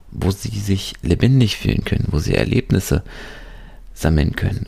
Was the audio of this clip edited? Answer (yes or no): yes